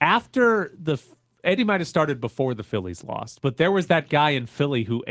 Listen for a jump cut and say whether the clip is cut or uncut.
cut